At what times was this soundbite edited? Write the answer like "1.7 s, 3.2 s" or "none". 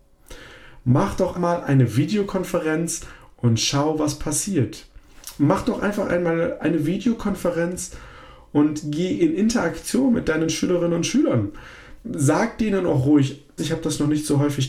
1.3 s, 13.6 s